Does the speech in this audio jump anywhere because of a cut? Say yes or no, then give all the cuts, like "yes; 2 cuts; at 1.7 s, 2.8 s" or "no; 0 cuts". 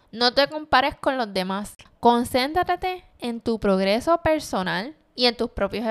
yes; 1 cut; at 1.9 s